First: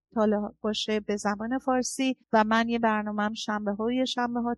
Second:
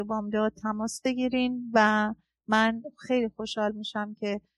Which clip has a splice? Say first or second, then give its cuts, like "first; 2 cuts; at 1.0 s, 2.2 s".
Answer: first; 1 cut; at 2.2 s